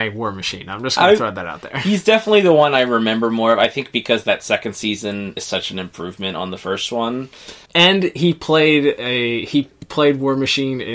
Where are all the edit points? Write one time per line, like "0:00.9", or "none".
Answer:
0:05.4
0:07.7